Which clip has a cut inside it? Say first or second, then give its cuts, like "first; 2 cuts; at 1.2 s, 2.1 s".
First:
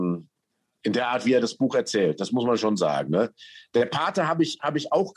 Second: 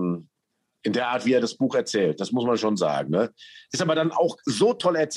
second; 1 cut; at 3.7 s